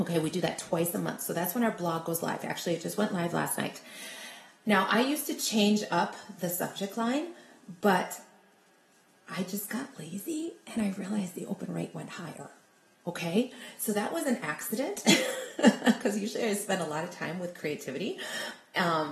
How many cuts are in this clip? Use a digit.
0